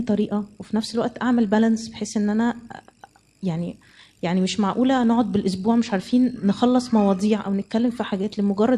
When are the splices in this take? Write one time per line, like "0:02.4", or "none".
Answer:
none